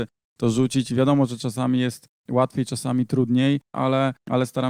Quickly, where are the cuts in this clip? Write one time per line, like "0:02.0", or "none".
0:03.7